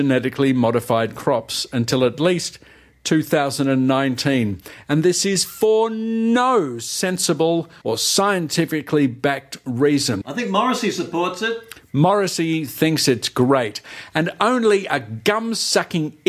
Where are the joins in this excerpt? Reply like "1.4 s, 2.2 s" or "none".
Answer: 7.8 s, 10.2 s